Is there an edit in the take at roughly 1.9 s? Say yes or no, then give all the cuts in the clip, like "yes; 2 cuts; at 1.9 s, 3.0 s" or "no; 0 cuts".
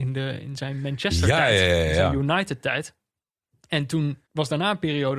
no; 1 cut; at 4.2 s